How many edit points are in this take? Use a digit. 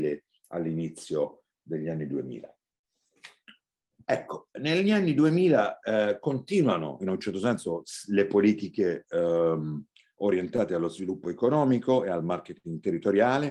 0